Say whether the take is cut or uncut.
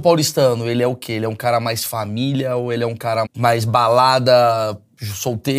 cut